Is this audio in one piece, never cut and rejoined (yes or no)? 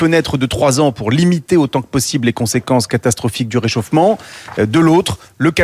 yes